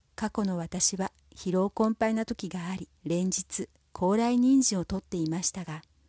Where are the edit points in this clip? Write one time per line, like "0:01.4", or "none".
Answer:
0:03.0